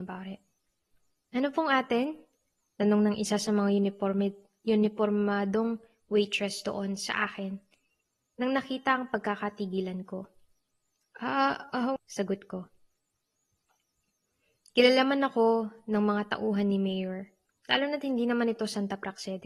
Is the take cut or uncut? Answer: cut